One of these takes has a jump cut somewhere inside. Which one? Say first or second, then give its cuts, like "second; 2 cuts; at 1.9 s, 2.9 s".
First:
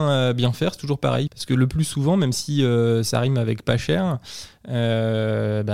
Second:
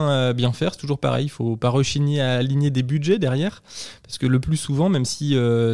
first; 1 cut; at 1.3 s